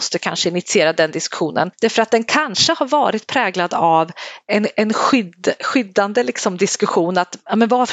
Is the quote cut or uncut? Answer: uncut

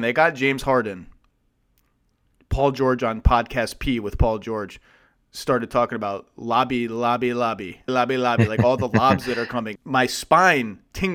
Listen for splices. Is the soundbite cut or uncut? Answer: cut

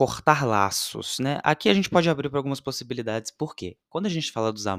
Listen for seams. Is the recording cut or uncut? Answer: uncut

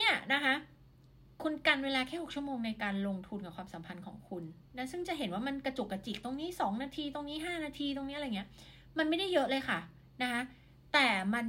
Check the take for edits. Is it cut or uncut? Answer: cut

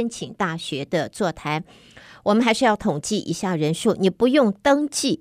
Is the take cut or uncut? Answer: uncut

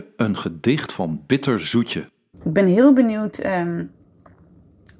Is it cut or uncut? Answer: cut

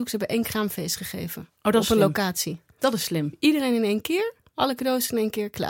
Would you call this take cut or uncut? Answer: uncut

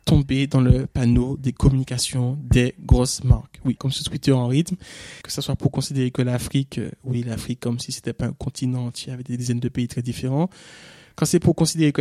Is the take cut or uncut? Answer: cut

